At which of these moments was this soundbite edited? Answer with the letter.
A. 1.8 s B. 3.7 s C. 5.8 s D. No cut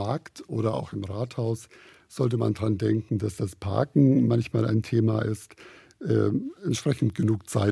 D